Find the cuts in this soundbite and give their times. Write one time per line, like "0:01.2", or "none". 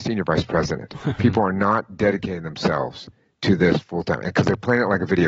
0:01.2